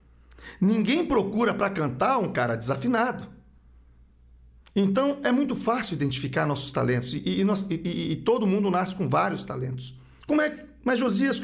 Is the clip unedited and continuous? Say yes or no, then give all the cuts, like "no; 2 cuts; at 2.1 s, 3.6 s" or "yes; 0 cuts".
no; 1 cut; at 10.2 s